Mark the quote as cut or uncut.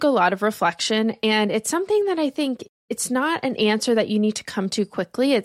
cut